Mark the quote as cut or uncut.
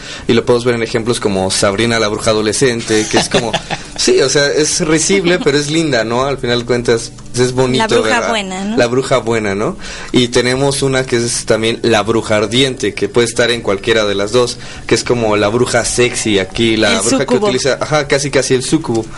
cut